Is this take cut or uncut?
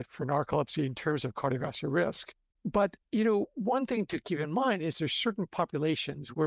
cut